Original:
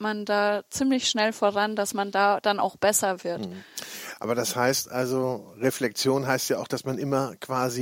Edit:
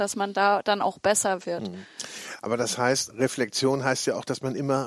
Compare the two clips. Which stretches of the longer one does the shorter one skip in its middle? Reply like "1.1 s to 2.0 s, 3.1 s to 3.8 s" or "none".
4.9 s to 5.5 s